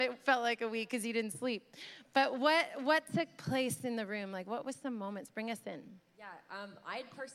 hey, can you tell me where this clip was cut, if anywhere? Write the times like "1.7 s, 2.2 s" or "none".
none

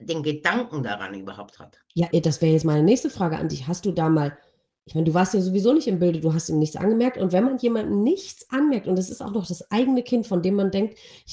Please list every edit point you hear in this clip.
2.1 s

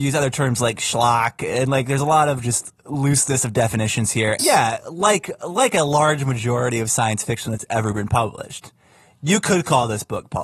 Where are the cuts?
4.4 s

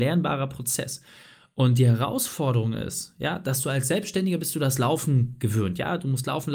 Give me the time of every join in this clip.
none

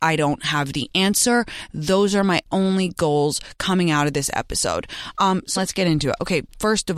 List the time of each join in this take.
5.6 s

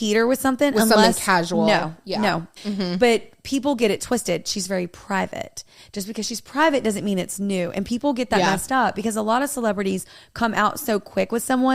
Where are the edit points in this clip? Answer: 2.6 s

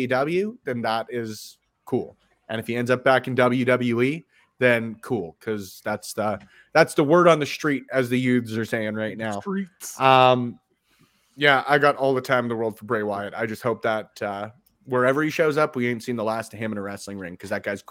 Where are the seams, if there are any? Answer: none

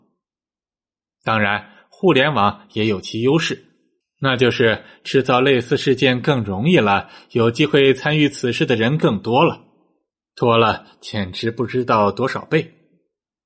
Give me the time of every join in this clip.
none

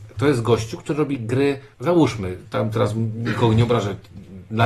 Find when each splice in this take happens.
1.7 s

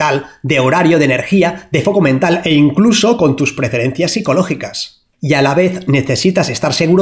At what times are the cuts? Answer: none

